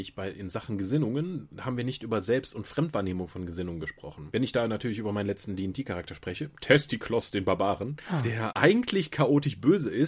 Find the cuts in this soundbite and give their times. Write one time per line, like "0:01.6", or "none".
none